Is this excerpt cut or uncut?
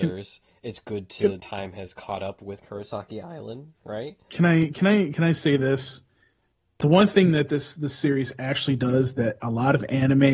cut